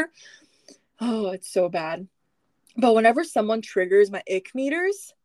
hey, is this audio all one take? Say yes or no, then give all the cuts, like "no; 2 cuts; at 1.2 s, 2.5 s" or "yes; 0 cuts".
yes; 0 cuts